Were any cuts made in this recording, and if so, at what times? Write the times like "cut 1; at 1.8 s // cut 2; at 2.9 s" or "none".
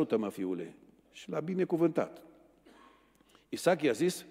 cut 1; at 1.0 s